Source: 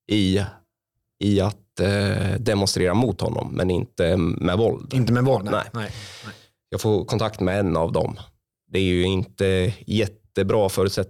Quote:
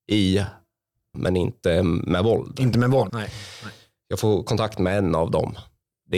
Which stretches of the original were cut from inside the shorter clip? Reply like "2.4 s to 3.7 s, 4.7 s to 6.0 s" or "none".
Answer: 1.1 s to 3.5 s, 5.4 s to 5.7 s